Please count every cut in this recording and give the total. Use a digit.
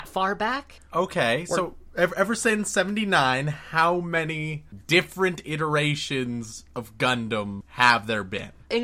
0